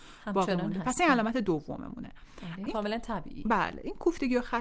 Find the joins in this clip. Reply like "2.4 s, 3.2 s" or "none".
2.6 s